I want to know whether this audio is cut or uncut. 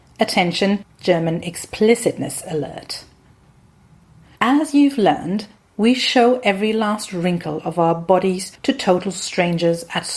cut